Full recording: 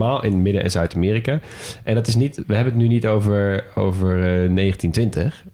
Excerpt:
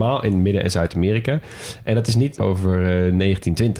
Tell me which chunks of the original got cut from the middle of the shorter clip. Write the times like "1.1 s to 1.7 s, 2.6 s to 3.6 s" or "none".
2.4 s to 3.7 s